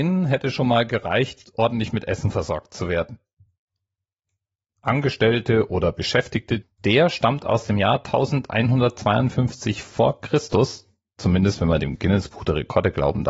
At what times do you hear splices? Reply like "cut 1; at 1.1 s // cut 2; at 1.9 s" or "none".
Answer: cut 1; at 4.7 s // cut 2; at 6.6 s